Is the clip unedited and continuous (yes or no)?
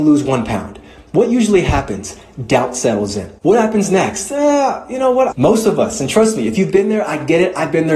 no